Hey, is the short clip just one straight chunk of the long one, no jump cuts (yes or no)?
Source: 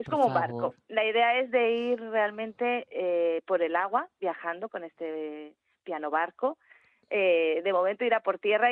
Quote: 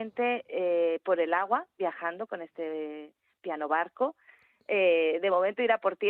yes